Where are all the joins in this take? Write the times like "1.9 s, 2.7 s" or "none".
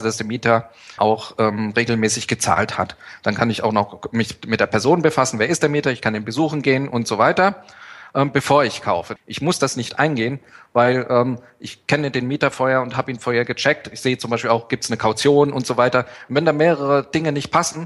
1.0 s, 9.2 s